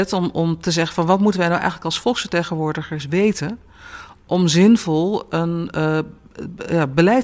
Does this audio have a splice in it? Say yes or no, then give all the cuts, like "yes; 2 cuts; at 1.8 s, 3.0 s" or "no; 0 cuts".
no; 0 cuts